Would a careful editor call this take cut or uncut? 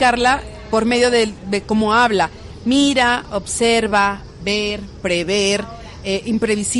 uncut